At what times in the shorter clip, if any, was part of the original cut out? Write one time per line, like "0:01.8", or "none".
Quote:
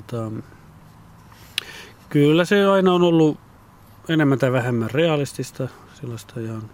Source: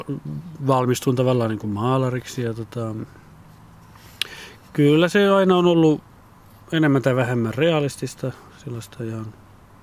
none